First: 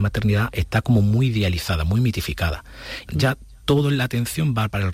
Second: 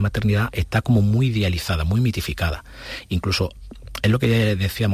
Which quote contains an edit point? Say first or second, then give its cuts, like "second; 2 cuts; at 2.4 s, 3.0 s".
first; 1 cut; at 3.1 s